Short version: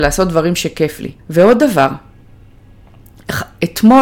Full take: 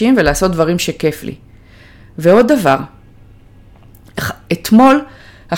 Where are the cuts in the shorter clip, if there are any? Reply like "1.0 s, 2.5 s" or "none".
1.2 s